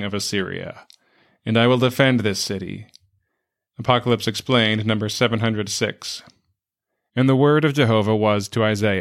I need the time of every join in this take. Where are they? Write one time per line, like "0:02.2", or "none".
0:03.7
0:07.1